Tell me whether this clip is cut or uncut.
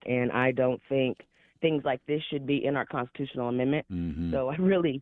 cut